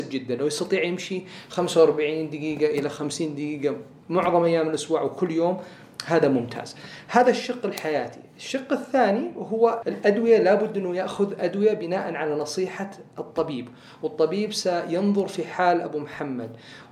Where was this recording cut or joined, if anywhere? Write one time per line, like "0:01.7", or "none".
0:09.8